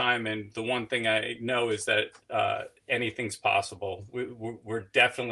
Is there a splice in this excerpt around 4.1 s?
no; 0 cuts

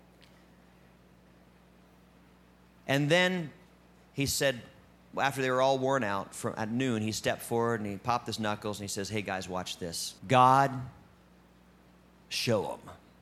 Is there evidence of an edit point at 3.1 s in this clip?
no; 1 cut; at 10.2 s

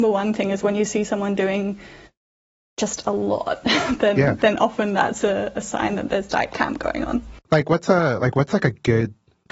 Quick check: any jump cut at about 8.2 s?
no; 0 cuts

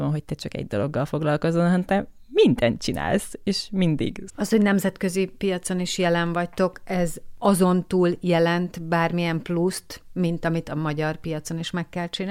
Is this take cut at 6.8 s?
no; 1 cut; at 4.3 s

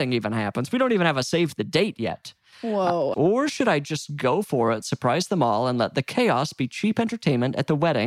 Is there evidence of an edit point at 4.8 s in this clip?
no; 1 cut; at 3.1 s

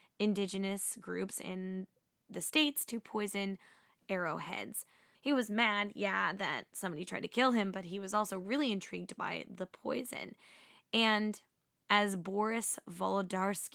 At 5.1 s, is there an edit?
yes; 1 cut; at 5.1 s

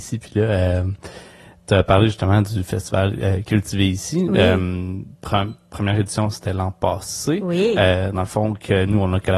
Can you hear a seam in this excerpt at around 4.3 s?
no; 0 cuts

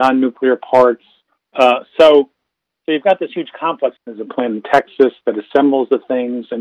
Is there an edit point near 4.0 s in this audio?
yes; 2 cuts; at 1.4 s, 4.0 s

